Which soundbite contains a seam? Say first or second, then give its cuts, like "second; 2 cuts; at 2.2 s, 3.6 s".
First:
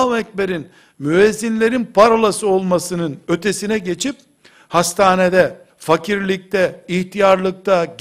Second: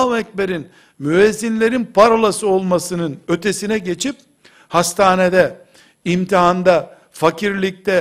first; 2 cuts; at 5.7 s, 6.8 s